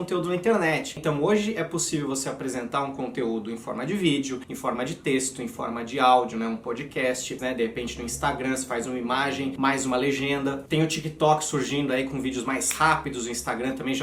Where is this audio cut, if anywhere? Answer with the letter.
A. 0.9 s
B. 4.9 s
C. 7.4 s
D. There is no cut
C